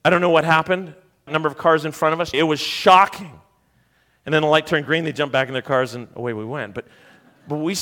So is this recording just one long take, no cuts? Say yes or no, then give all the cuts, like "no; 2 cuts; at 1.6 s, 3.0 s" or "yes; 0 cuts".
no; 2 cuts; at 1.3 s, 2.3 s